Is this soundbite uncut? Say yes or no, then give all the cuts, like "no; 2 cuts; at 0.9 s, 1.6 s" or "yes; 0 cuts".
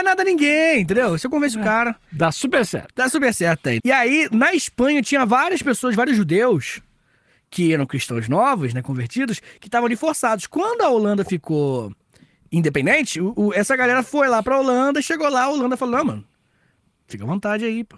no; 1 cut; at 3.8 s